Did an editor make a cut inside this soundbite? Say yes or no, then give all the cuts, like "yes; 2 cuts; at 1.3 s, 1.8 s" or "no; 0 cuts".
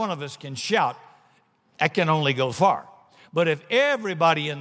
yes; 1 cut; at 2.5 s